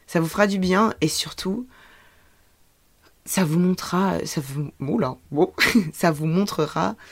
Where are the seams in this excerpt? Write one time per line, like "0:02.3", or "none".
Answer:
none